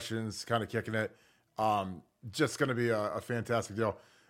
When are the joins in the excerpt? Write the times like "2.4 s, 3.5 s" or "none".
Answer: none